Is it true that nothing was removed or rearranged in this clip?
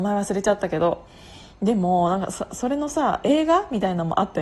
yes; 0 cuts

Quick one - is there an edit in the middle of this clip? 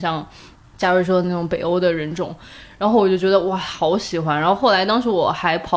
no; 0 cuts

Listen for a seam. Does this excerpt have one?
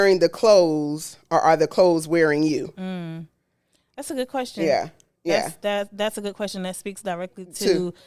no; 0 cuts

